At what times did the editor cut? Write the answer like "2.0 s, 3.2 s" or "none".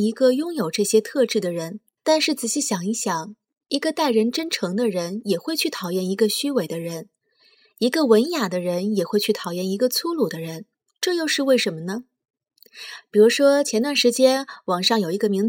2.0 s, 10.9 s, 13.0 s